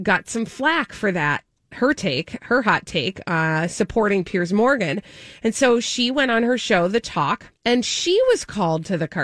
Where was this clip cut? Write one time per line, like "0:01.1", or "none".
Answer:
0:07.6

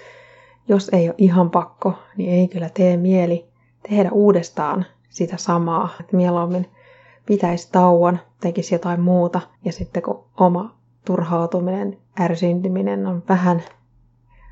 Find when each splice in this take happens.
0:06.0
0:09.6

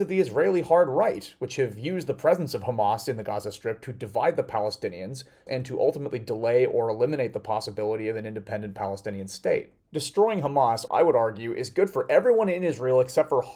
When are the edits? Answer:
0:05.5
0:09.8
0:10.9

